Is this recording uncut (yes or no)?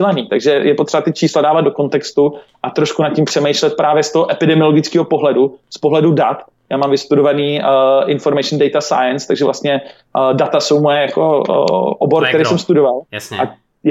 yes